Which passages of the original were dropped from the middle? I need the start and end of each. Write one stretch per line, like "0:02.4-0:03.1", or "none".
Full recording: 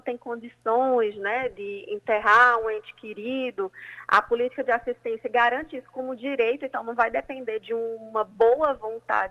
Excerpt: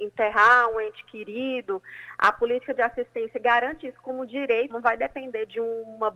0:06.6-0:06.8